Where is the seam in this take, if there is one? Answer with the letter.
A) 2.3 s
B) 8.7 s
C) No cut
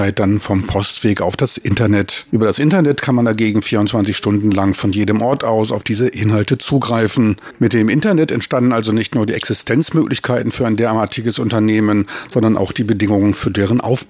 A